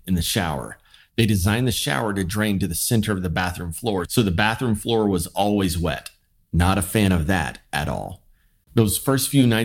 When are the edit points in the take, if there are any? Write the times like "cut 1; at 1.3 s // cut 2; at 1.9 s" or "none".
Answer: cut 1; at 8.6 s